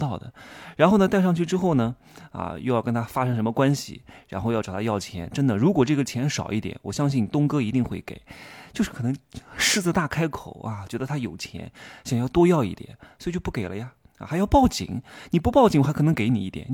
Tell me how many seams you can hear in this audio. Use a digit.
0